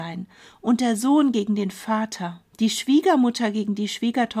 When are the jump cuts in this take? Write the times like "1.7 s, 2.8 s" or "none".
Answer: 2.5 s